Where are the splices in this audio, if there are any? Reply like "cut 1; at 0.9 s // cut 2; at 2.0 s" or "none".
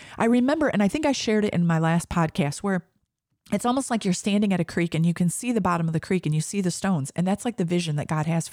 none